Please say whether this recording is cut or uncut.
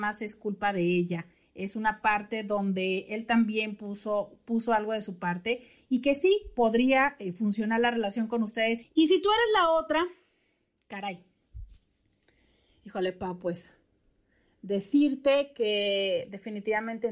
cut